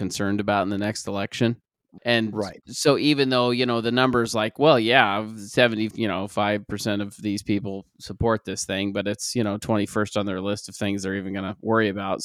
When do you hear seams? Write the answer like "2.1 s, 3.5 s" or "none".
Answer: 2.0 s